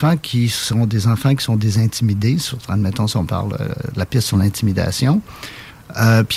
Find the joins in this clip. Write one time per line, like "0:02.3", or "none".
none